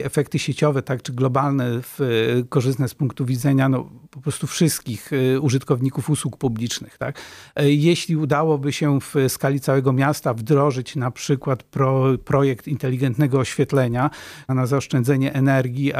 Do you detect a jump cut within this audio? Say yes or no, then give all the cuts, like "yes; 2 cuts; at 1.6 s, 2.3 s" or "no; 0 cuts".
yes; 1 cut; at 14.5 s